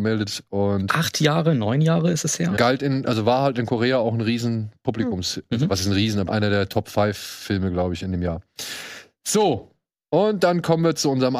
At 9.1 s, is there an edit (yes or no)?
no